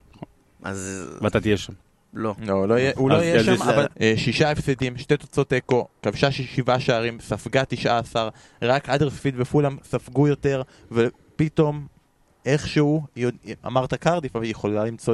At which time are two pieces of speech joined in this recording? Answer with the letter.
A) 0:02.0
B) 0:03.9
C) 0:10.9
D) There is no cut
B